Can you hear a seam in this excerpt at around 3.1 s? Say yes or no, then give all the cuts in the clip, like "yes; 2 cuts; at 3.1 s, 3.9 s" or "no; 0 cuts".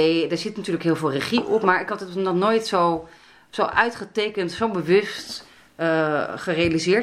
no; 0 cuts